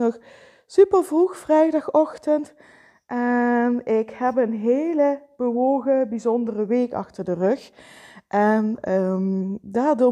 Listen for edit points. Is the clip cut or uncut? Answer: uncut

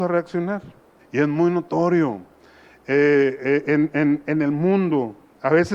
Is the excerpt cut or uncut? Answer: cut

